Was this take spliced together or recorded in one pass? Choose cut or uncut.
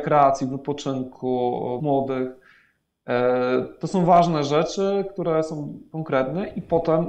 cut